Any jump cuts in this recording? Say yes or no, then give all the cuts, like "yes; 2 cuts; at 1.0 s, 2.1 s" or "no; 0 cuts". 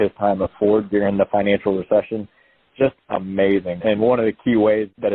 no; 0 cuts